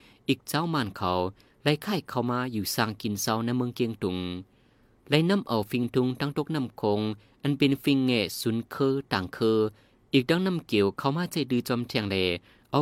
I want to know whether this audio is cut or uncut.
uncut